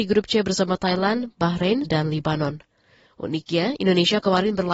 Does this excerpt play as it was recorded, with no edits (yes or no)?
no